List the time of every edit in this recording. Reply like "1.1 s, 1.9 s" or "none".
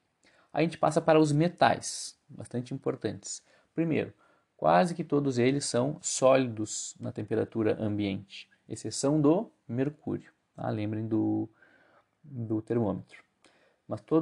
2.2 s